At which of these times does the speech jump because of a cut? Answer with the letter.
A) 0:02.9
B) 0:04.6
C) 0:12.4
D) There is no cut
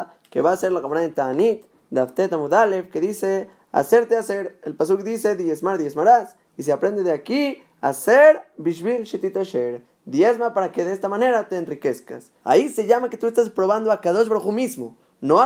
C